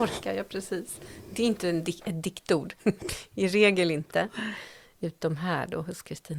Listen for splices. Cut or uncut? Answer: cut